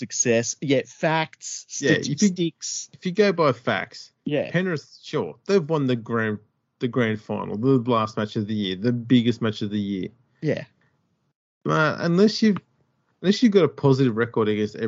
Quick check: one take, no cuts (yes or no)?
yes